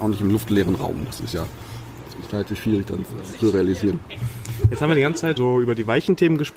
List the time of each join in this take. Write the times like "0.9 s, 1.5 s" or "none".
5.4 s